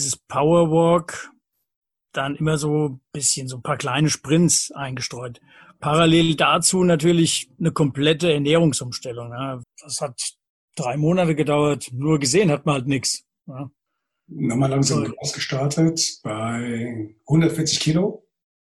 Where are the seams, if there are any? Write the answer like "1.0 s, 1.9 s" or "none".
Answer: 9.6 s